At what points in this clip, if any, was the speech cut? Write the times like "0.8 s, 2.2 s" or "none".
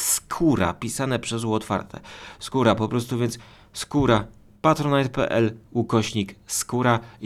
none